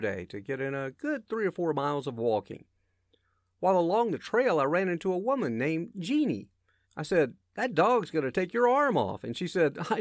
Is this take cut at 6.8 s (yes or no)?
yes